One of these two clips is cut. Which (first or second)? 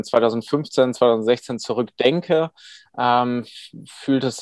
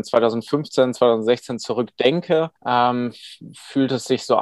second